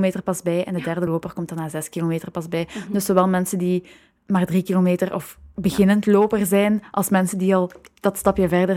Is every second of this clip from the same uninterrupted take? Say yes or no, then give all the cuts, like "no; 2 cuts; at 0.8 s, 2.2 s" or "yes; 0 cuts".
yes; 0 cuts